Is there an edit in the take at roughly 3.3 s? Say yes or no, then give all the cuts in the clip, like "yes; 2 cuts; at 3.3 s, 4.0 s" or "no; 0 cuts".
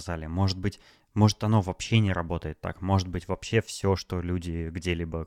no; 0 cuts